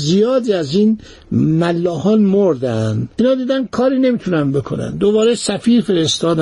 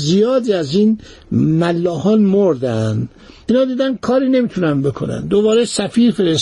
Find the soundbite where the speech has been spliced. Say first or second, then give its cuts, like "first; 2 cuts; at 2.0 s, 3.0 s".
first; 1 cut; at 3.1 s